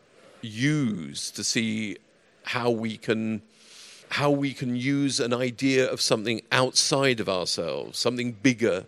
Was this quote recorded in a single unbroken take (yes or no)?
no